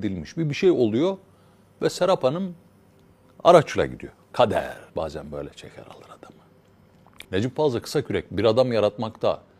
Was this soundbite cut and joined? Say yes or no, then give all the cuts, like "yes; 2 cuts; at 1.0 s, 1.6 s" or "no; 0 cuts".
yes; 2 cuts; at 4.9 s, 7.2 s